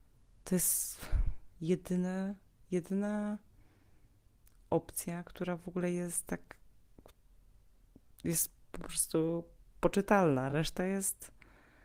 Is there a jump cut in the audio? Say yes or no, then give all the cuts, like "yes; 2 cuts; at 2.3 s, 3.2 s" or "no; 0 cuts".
no; 0 cuts